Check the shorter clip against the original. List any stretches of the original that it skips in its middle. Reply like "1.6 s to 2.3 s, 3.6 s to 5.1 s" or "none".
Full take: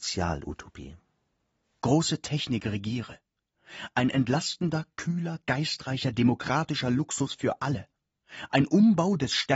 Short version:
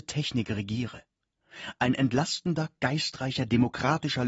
4.9 s to 5.4 s